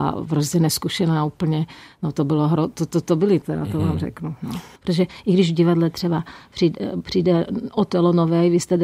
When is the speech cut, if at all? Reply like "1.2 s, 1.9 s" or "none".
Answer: 3.4 s, 4.8 s